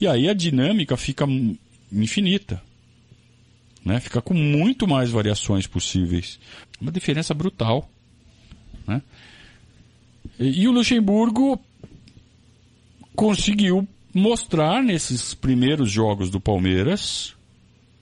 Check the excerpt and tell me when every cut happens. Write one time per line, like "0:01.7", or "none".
0:06.6